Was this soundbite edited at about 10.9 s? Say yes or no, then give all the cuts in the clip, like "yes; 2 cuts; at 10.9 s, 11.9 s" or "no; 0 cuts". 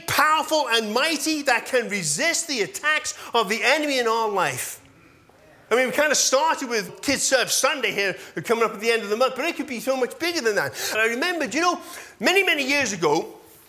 yes; 3 cuts; at 5.7 s, 6.9 s, 10.9 s